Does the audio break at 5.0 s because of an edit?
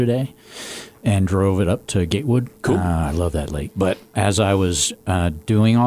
no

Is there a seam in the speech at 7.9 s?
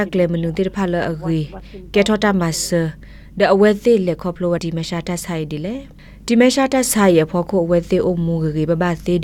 no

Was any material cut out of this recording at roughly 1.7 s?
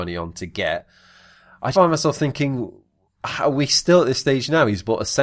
yes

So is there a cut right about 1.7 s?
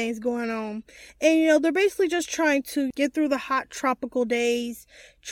no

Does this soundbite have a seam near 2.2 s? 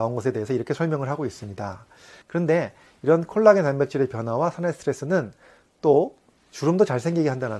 yes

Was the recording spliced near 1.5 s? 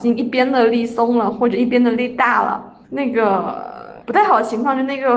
no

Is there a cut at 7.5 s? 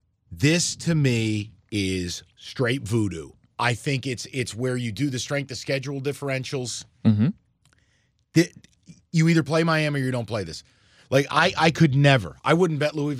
no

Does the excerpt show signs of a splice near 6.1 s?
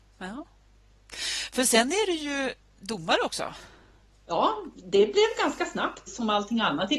yes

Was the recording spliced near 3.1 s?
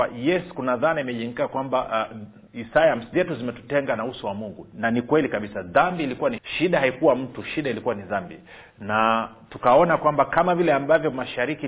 yes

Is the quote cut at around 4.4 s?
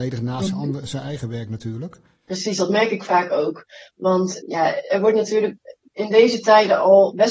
yes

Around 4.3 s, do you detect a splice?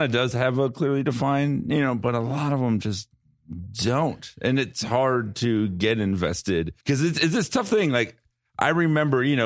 no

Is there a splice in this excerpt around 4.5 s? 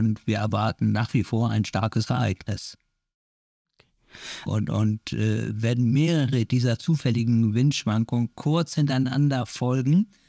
yes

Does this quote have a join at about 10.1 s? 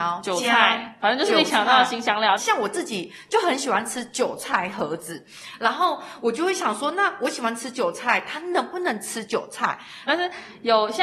yes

